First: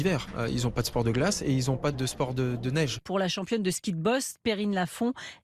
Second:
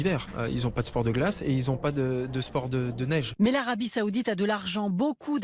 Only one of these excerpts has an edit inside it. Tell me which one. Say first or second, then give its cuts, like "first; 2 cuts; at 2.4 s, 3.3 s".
first; 2 cuts; at 1.9 s, 3.0 s